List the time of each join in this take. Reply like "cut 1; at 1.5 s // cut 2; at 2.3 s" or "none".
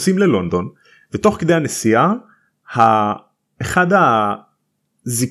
none

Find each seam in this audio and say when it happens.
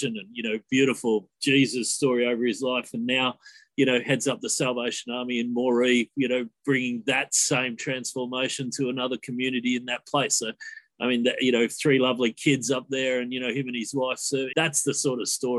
cut 1; at 14.5 s

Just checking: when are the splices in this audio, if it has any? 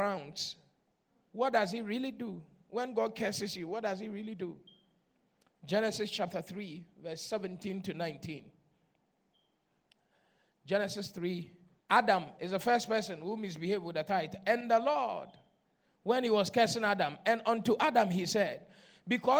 cut 1; at 11.8 s

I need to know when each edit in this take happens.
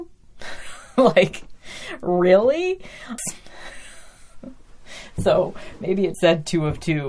cut 1; at 3.2 s // cut 2; at 6.1 s

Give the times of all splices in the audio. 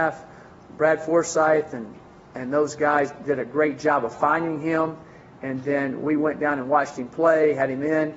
none

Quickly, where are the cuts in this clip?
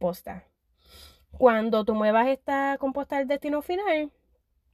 none

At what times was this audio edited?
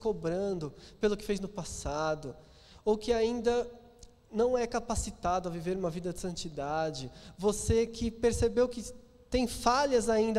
none

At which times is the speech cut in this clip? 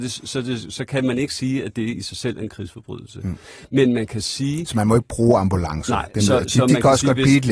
none

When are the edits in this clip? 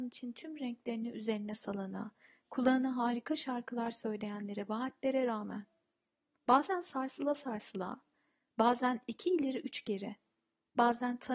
none

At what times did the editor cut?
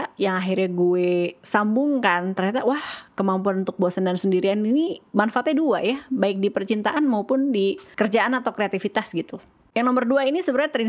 none

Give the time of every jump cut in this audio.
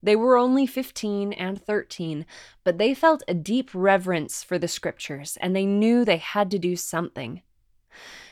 none

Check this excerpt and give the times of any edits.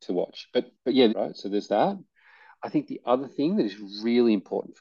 cut 1; at 1.1 s

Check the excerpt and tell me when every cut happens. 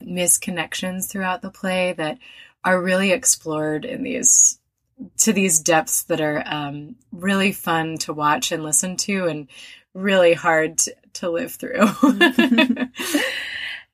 none

